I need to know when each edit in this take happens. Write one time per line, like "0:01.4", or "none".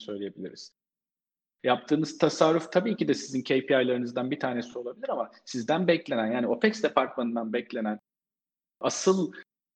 0:01.4